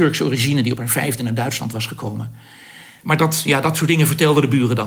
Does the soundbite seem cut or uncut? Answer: cut